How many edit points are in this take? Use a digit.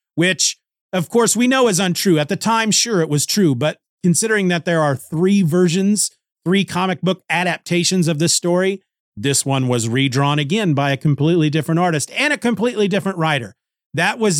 0